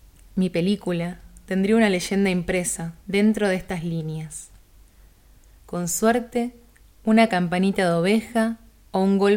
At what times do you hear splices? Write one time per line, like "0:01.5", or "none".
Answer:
0:03.0
0:05.6